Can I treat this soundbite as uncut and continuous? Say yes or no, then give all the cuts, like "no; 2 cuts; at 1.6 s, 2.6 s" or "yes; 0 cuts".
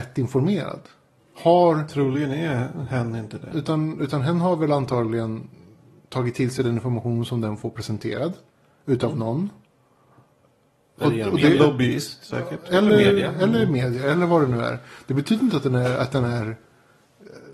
no; 1 cut; at 3.5 s